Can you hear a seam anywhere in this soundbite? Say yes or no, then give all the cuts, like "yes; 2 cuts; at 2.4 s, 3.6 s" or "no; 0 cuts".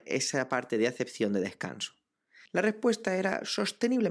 yes; 1 cut; at 2.5 s